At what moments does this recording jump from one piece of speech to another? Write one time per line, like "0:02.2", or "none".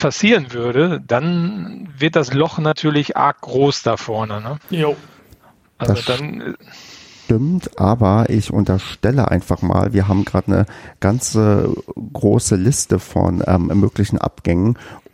0:04.6